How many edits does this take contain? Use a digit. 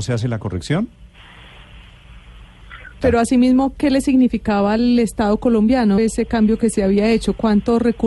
2